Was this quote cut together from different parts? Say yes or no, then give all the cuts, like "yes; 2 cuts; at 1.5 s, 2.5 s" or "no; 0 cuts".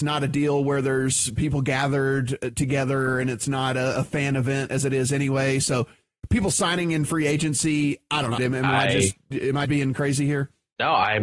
yes; 2 cuts; at 8.4 s, 9.6 s